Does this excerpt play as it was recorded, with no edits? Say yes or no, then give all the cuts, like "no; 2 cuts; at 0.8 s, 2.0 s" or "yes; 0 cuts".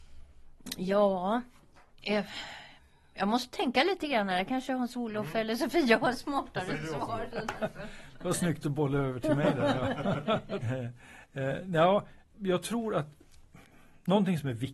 no; 2 cuts; at 10.6 s, 12.3 s